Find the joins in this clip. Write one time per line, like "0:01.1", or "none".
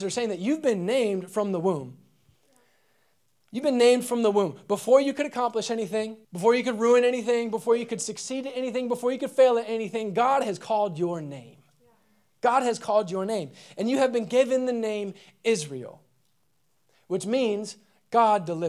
0:06.2